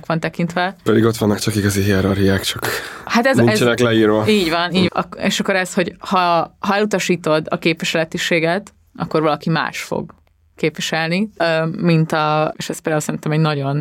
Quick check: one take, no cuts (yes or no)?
no